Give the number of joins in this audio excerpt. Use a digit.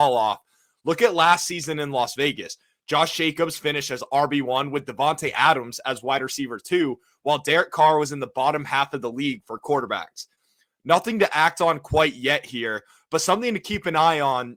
0